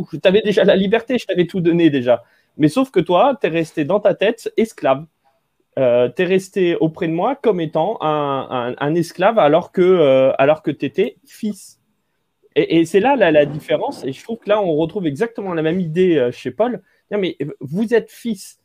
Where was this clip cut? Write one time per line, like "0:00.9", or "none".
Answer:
none